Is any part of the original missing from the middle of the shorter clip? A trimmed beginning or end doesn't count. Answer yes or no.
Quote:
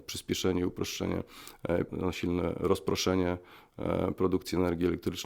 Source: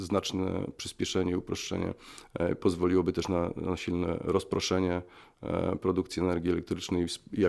yes